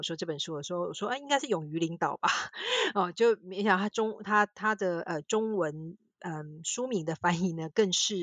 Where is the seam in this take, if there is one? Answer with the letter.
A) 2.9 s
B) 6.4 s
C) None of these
C